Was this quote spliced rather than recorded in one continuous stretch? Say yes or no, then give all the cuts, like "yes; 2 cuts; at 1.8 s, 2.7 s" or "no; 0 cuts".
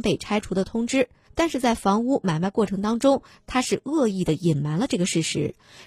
no; 0 cuts